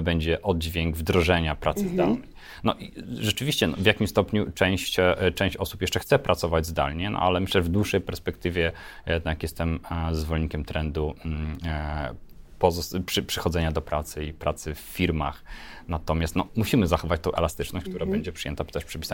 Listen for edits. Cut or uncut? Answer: cut